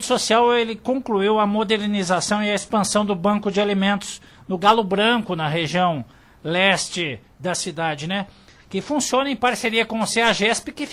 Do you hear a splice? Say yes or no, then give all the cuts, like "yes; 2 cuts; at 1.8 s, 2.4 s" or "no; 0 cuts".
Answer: no; 0 cuts